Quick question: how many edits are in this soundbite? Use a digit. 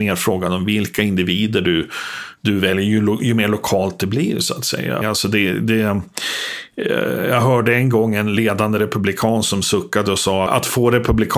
2